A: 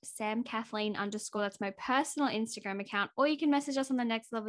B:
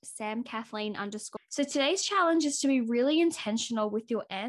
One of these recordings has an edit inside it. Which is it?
B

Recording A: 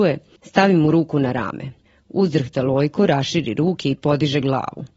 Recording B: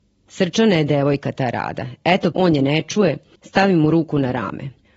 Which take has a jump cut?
B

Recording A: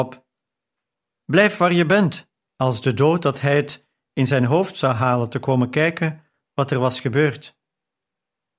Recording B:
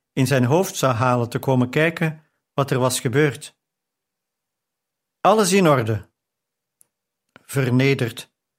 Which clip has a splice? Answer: A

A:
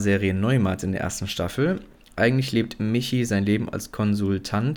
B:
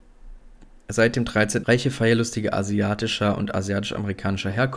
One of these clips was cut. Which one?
B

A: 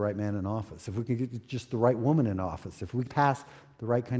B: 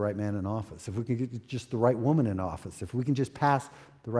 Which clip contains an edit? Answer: A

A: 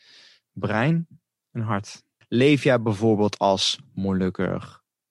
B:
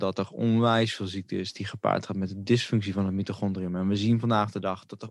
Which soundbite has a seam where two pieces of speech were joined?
A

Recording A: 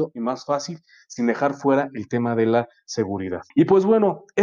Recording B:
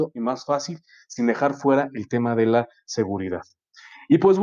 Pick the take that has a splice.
A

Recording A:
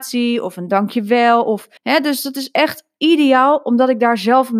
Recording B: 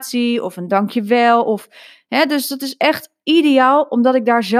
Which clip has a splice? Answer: A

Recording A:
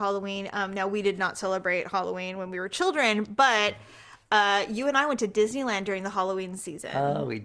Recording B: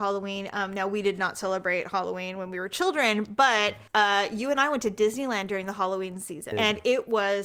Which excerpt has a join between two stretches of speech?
B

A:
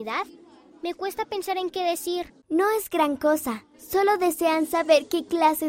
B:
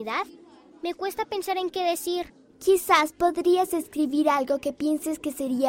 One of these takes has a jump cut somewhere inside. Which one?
A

